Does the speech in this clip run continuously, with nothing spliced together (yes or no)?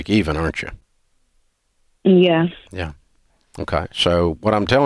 yes